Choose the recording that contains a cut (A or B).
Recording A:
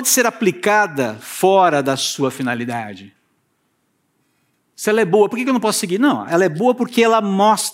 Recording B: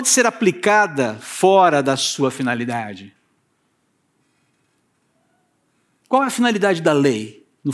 A